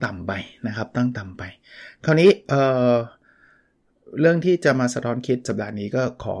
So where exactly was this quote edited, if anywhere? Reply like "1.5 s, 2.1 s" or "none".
none

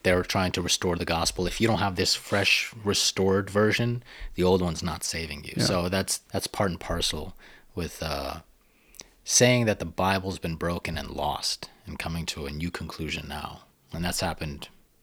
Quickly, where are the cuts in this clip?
6.2 s

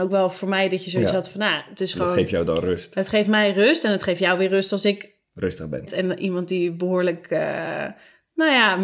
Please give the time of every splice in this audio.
5.9 s

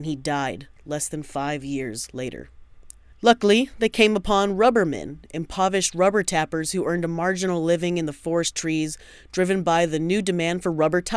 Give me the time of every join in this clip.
3.1 s

